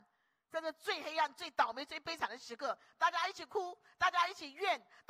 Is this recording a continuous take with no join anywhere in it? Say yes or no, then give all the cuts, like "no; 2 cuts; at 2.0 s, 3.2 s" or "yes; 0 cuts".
yes; 0 cuts